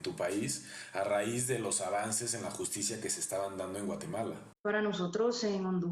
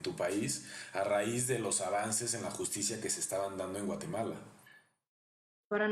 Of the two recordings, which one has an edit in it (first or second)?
first